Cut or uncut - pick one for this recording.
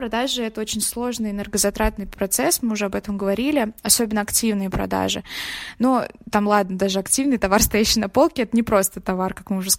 uncut